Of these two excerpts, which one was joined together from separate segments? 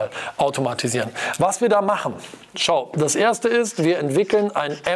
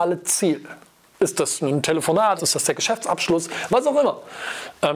second; 1 cut; at 2.4 s

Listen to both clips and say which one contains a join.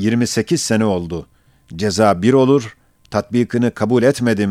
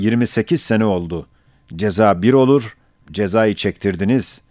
second; 1 cut; at 3.0 s

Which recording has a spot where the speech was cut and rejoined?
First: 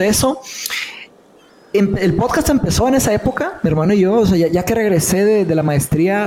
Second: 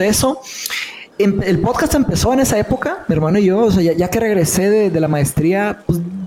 second; 1 cut; at 1.1 s

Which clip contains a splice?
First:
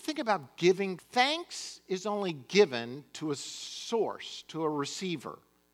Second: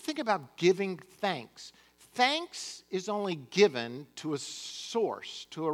first; 1 cut; at 1.0 s

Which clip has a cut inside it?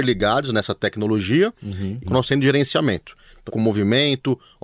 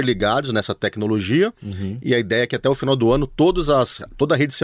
first; 2 cuts; at 2.0 s, 3.5 s

